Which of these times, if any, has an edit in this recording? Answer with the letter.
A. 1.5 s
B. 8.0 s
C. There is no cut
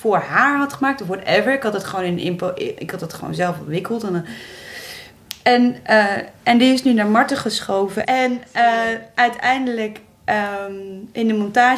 B